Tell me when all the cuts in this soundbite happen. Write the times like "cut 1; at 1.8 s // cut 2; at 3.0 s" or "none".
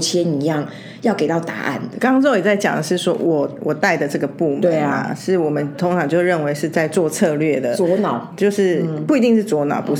cut 1; at 2.0 s

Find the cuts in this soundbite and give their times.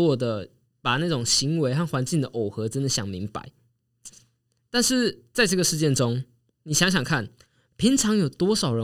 none

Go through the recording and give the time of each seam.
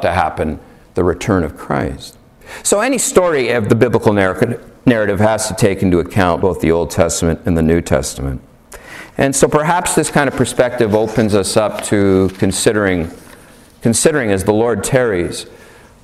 cut 1; at 6.4 s // cut 2; at 9.1 s

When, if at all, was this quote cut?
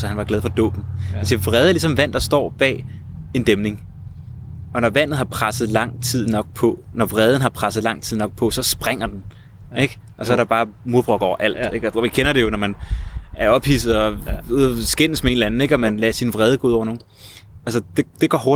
cut 1; at 11.9 s // cut 2; at 17.6 s

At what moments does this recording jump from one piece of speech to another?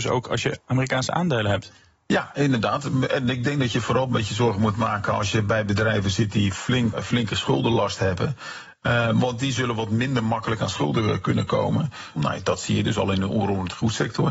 cut 1; at 6.9 s // cut 2; at 12.2 s

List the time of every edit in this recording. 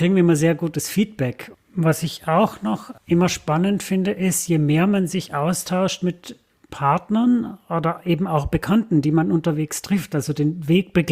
cut 1; at 1.5 s // cut 2; at 3.0 s

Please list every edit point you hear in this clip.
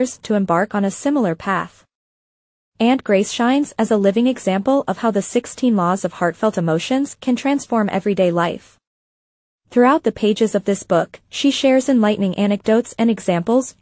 none

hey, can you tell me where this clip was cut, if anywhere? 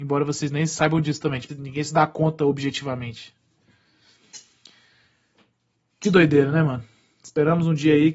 cut 1; at 1.5 s

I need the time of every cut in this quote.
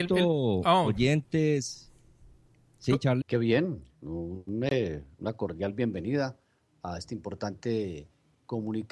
cut 1; at 3.2 s

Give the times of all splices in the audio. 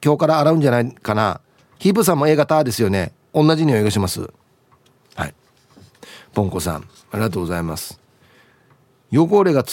none

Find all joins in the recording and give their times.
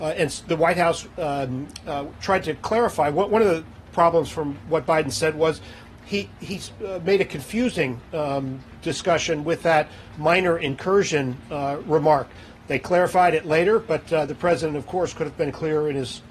none

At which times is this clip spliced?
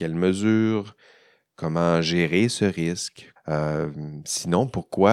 cut 1; at 3.4 s

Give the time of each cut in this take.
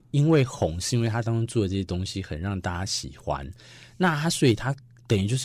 none

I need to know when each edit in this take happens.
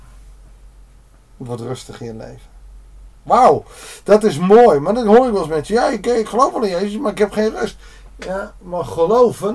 none

